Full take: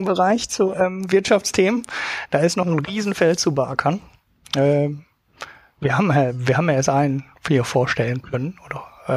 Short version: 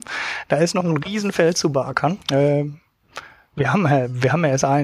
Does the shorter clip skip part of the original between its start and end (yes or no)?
yes